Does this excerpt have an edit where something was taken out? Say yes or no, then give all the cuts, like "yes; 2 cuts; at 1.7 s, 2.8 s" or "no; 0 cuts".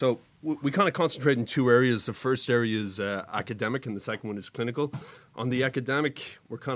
no; 0 cuts